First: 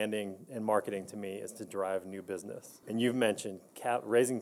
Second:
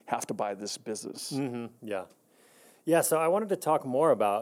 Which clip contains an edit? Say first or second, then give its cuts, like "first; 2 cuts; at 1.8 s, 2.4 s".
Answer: first; 1 cut; at 2.8 s